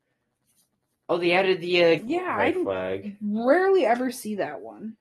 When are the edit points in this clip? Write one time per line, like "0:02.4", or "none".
0:02.0

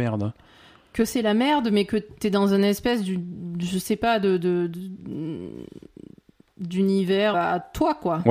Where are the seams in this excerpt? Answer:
0:07.3

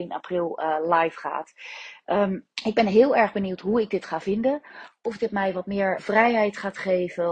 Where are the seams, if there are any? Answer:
0:02.5
0:06.0

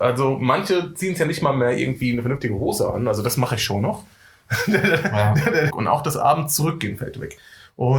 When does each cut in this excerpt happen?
0:05.7

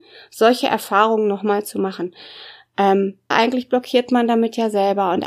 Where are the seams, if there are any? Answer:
0:03.3

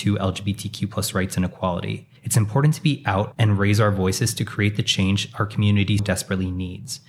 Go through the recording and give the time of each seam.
0:02.2
0:06.0

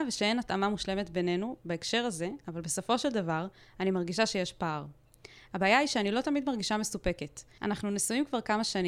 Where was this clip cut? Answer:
0:07.6

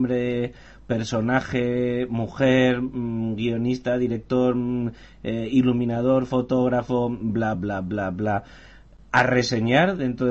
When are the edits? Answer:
0:07.5

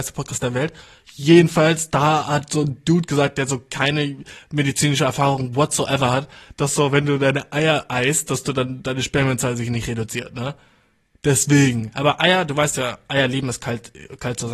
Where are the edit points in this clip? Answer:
none

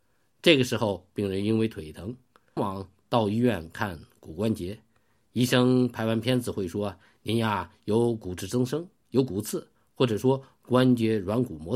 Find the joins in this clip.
0:02.6

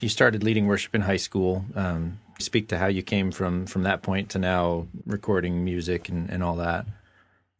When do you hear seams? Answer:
0:02.4
0:05.0

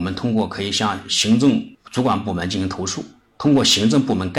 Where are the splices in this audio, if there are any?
none

